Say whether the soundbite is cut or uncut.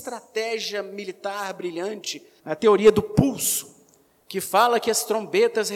cut